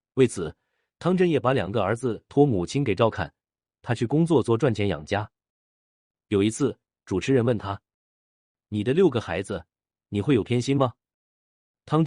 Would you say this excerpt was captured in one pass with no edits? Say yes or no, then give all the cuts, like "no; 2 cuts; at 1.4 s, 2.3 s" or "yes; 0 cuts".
no; 1 cut; at 6.1 s